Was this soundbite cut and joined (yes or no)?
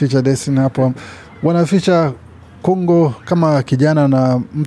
no